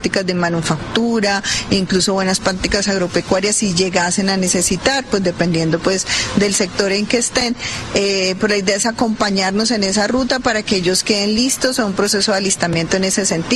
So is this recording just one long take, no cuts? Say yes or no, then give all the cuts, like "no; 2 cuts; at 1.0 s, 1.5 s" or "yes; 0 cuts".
yes; 0 cuts